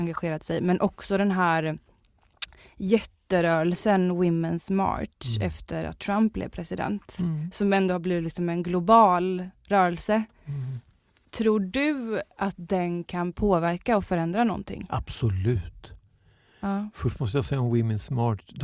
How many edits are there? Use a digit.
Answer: 0